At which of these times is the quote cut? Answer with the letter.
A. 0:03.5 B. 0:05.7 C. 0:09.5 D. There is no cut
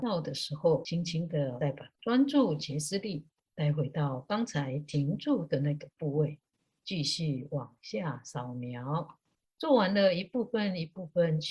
D